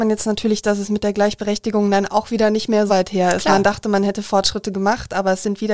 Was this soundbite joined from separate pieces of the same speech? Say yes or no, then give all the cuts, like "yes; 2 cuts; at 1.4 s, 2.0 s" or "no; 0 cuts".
yes; 1 cut; at 2.9 s